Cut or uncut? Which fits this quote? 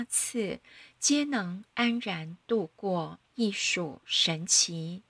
cut